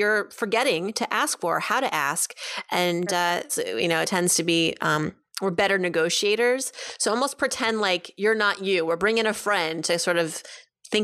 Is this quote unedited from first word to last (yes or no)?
no